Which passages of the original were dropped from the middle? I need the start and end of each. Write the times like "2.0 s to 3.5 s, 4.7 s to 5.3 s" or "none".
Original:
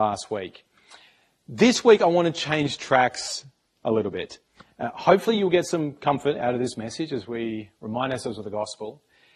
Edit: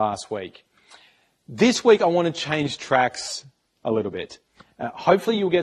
none